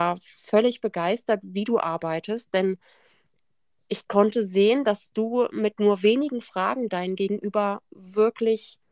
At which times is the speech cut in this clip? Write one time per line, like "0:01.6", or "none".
none